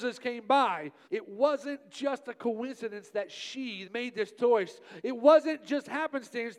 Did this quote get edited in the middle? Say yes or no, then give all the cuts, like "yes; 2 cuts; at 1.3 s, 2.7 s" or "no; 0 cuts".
yes; 2 cuts; at 1.0 s, 3.8 s